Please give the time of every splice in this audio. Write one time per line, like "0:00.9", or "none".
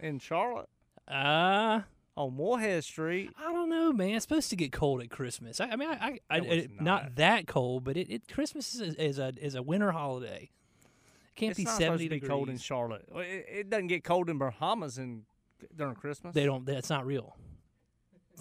none